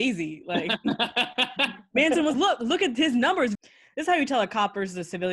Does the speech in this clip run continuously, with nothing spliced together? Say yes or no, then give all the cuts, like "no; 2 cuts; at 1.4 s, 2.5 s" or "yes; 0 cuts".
no; 2 cuts; at 2.3 s, 3.5 s